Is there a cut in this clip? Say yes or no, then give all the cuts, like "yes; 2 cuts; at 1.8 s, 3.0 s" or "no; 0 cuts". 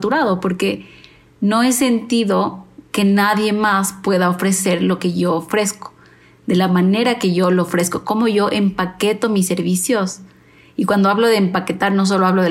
no; 0 cuts